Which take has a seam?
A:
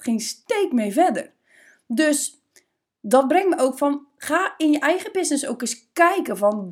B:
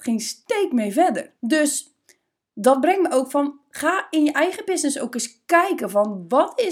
B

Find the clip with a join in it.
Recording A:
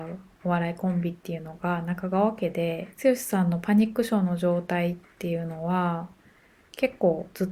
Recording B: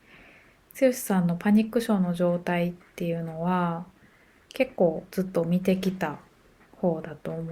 A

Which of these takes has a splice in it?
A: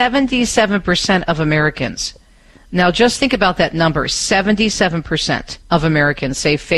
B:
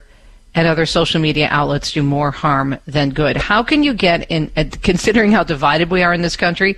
A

